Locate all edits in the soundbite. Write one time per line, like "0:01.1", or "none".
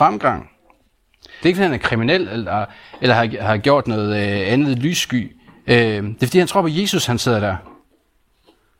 0:01.4